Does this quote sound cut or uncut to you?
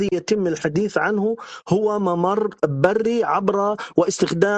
uncut